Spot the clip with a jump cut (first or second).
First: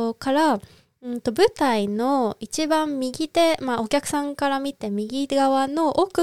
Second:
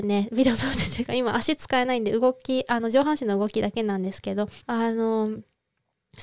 second